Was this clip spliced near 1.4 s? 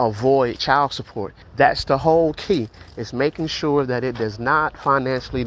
yes; 1 cut; at 1.4 s

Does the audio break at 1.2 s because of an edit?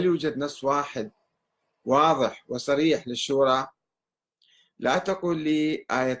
no; 0 cuts

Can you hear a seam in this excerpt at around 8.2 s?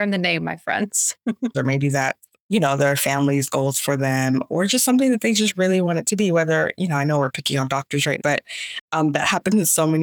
yes; 2 cuts; at 1.5 s, 8.2 s

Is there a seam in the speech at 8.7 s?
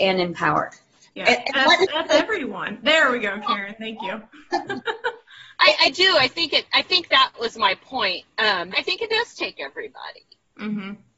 yes; 1 cut; at 8.7 s

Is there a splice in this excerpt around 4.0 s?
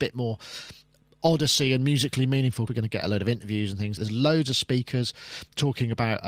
yes; 2 cuts; at 2.7 s, 4.0 s

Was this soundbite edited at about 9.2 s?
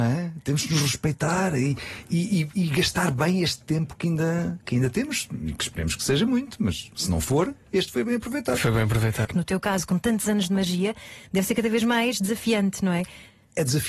yes; 1 cut; at 9.2 s

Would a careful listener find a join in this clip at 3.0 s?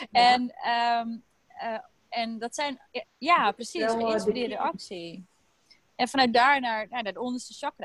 yes; 1 cut; at 3.0 s

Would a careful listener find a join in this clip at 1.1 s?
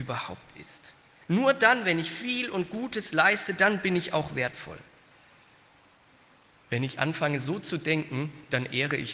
no; 1 cut; at 6.5 s

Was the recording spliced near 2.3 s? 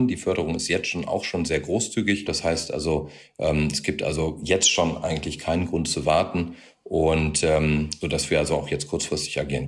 yes; 2 cuts; at 2.3 s, 8.0 s

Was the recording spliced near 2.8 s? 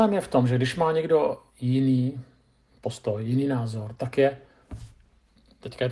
no; 0 cuts

